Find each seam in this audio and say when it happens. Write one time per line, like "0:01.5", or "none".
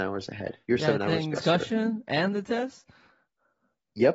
0:01.4